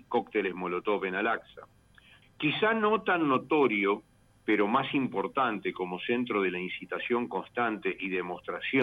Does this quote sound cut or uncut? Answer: cut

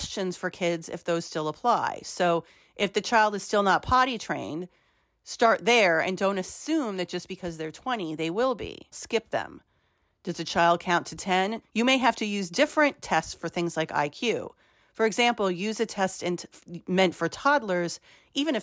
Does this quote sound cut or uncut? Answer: cut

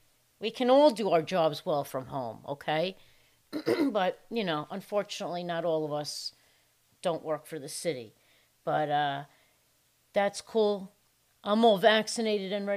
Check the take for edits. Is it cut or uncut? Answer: uncut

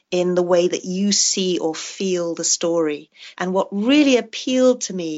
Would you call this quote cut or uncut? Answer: cut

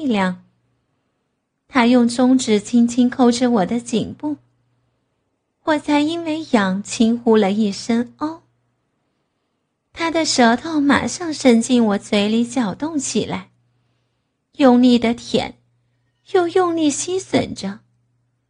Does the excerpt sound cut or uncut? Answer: uncut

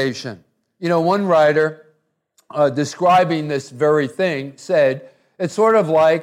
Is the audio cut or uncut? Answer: uncut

